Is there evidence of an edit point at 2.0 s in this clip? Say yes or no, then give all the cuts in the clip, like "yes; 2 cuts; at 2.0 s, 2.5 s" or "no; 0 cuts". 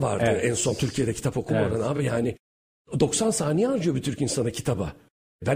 no; 0 cuts